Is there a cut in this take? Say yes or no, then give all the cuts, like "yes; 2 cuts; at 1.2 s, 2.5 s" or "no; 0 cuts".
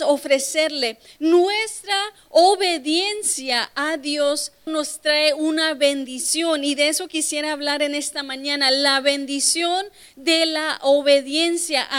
yes; 1 cut; at 4.7 s